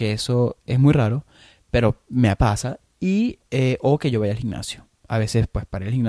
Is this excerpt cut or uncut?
uncut